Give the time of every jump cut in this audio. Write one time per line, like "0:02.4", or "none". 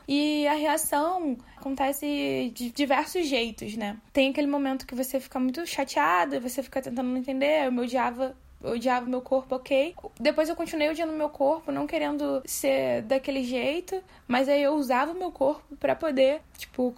0:04.1